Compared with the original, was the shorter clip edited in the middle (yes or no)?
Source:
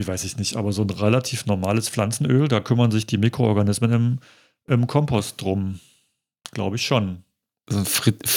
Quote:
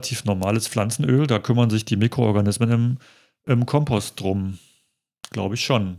no